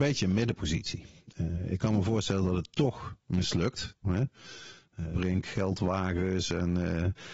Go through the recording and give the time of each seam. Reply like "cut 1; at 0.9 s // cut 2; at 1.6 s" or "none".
cut 1; at 4.0 s // cut 2; at 5.1 s